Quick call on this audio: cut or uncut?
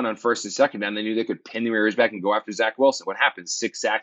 uncut